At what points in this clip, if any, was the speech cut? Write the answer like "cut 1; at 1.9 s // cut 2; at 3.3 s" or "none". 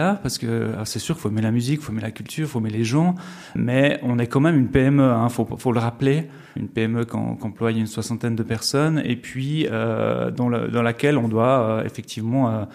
cut 1; at 3.6 s // cut 2; at 6.6 s